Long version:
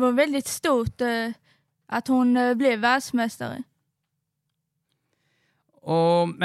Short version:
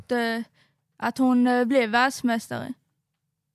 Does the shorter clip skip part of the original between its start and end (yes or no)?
no